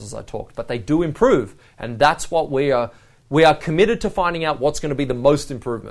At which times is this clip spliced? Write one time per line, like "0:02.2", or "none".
none